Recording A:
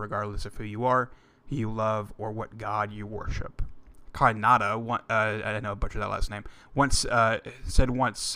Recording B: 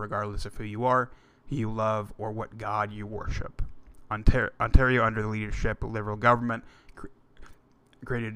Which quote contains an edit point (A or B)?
A